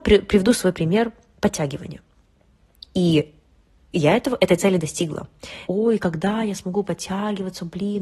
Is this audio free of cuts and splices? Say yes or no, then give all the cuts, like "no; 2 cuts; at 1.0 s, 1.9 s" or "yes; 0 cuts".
no; 2 cuts; at 2.8 s, 5.7 s